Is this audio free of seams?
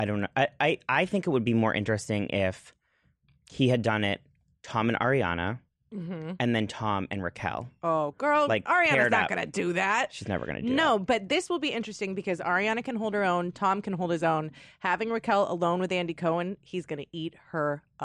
yes; 0 cuts

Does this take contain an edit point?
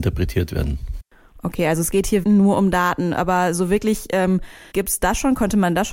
yes; 2 cuts; at 2.2 s, 4.7 s

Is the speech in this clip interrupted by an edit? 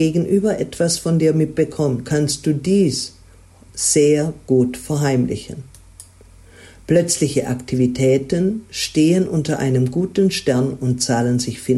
yes; 1 cut; at 2.0 s

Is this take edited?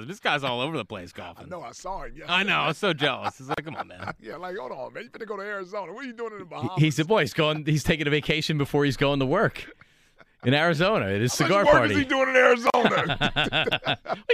no; 0 cuts

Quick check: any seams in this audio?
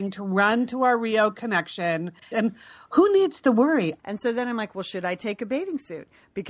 yes; 2 cuts; at 2.3 s, 4.0 s

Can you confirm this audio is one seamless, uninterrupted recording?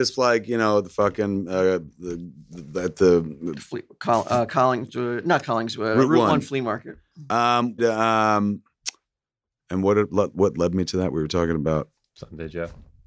no; 1 cut; at 7.8 s

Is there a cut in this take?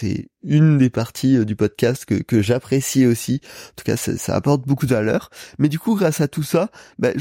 no; 0 cuts

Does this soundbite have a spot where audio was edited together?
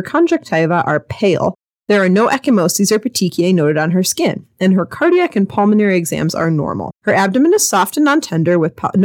yes; 1 cut; at 6.9 s

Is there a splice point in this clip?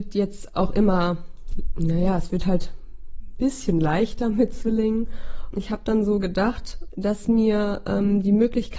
yes; 2 cuts; at 5.5 s, 6.9 s

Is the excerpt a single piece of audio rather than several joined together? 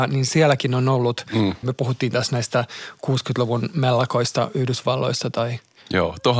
no; 1 cut; at 1.6 s

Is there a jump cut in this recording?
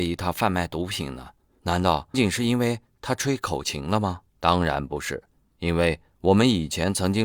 yes; 2 cuts; at 2.1 s, 4.3 s

